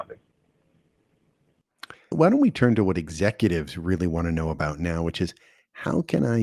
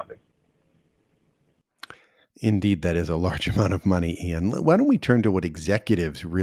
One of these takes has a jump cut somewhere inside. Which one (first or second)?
first